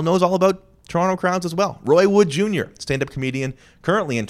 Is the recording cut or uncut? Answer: uncut